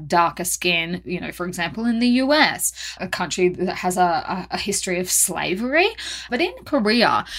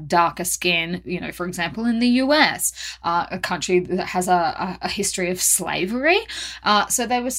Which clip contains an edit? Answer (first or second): first